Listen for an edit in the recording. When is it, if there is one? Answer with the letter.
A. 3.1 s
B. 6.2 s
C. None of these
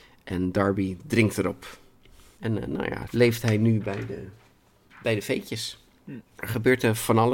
A